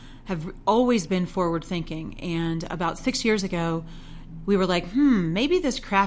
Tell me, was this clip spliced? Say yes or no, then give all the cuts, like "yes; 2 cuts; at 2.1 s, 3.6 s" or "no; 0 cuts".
no; 0 cuts